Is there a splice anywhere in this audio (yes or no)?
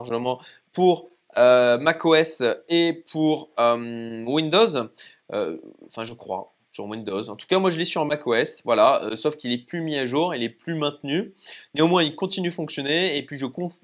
no